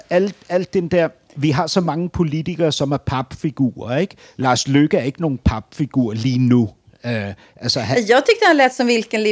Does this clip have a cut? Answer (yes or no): no